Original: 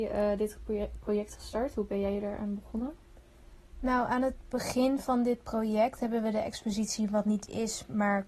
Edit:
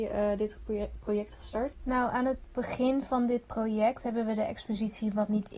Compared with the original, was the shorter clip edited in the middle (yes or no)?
yes